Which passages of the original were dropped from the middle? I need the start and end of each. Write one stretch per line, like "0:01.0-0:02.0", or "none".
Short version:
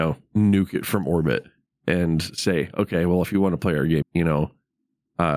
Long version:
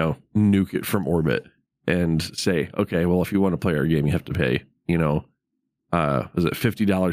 0:04.0-0:04.8